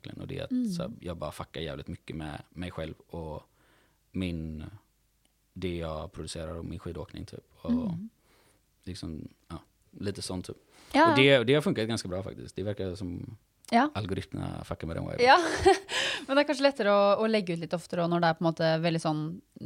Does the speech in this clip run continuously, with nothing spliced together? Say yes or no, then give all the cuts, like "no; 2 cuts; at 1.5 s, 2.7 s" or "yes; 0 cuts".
yes; 0 cuts